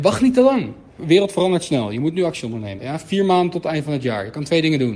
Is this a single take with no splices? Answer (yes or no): no